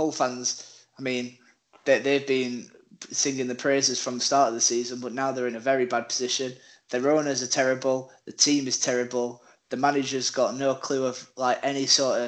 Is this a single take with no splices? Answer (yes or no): yes